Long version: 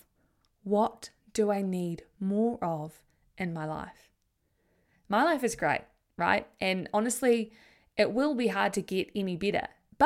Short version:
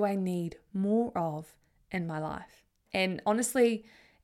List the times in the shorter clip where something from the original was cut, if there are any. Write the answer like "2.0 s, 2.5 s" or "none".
2.9 s

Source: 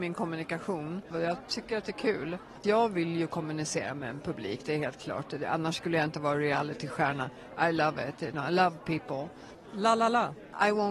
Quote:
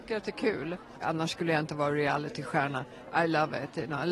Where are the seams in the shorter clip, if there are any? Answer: 1.0 s

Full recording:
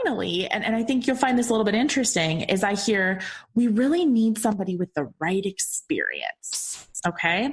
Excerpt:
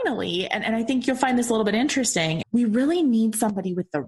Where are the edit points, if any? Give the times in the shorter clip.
2.4 s

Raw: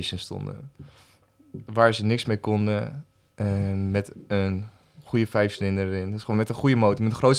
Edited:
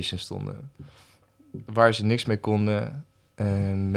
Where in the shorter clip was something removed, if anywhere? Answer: none

